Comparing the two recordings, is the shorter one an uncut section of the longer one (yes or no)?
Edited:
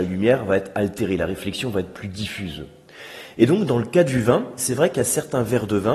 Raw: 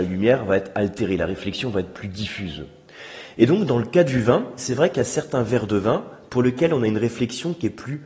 yes